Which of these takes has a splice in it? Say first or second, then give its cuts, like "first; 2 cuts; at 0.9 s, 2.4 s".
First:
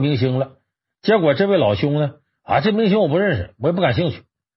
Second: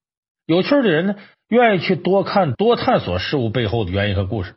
second; 2 cuts; at 1.3 s, 2.5 s